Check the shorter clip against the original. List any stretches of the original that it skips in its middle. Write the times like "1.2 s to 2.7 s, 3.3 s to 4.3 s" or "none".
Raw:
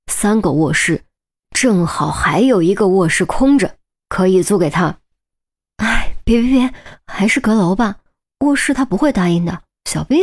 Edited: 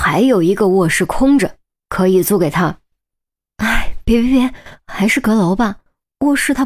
none